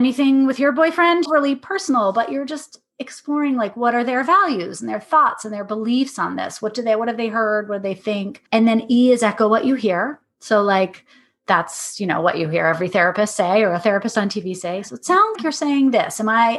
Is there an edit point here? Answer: yes; 3 cuts; at 1.3 s, 8.5 s, 15.4 s

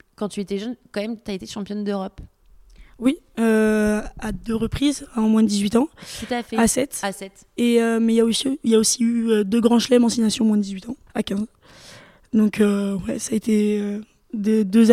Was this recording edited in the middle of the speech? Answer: yes; 1 cut; at 11.1 s

